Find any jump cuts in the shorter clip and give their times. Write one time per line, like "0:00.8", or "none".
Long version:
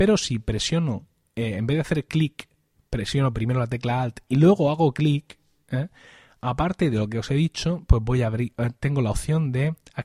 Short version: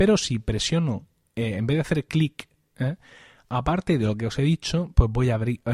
0:02.7